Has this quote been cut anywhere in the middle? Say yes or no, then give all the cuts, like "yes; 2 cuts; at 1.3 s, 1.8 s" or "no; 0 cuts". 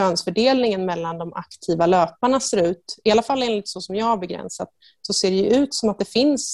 no; 0 cuts